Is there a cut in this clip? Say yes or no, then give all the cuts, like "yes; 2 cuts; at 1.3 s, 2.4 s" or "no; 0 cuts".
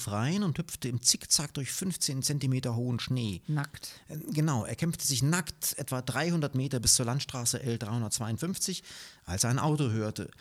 no; 0 cuts